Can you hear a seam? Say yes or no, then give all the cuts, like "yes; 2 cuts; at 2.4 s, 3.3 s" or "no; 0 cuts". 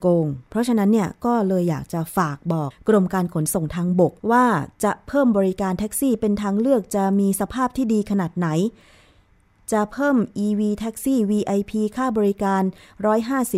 yes; 2 cuts; at 2.7 s, 4.2 s